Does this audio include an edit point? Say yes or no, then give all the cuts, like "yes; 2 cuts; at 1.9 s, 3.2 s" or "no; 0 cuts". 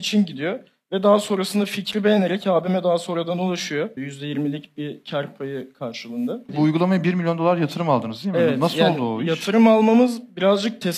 yes; 2 cuts; at 4.0 s, 6.5 s